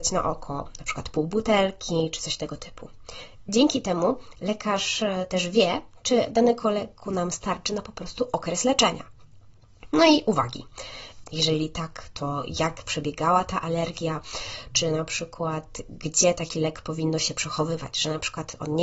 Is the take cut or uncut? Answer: cut